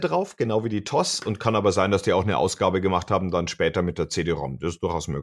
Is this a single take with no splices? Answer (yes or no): yes